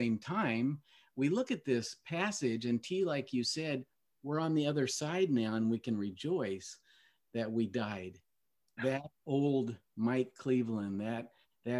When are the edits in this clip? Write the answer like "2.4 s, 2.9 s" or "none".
8.8 s